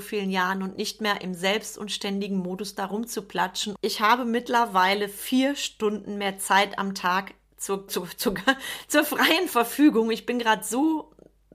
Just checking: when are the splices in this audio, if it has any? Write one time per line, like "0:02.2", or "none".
0:03.8
0:07.9